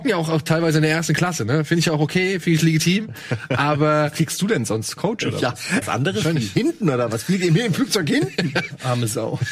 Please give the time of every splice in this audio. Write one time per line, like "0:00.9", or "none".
0:05.8